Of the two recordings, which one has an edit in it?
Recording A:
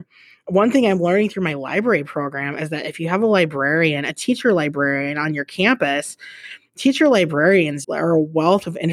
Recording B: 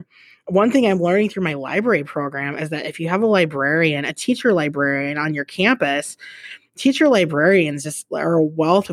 A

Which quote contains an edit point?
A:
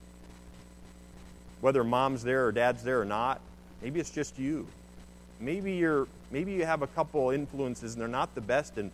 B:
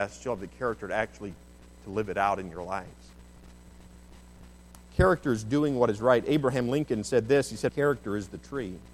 B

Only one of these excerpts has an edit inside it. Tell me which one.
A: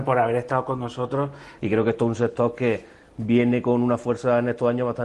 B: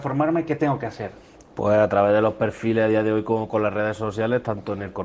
A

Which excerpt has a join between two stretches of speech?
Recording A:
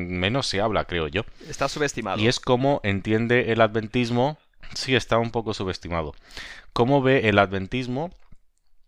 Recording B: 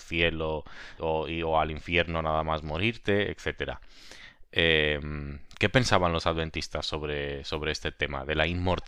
B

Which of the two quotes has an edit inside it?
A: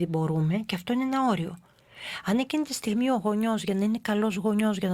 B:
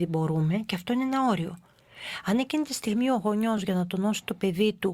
B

